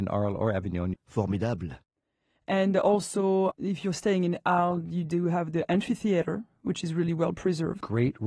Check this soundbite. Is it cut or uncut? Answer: cut